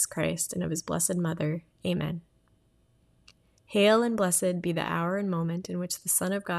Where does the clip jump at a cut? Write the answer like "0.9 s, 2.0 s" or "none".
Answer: none